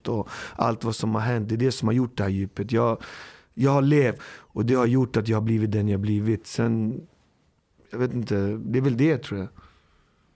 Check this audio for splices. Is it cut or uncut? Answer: cut